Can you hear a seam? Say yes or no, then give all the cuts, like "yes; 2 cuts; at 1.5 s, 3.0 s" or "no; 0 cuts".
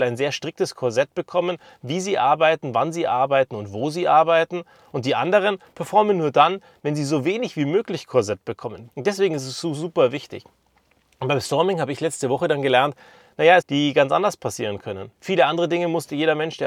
yes; 3 cuts; at 8.9 s, 13.6 s, 15.1 s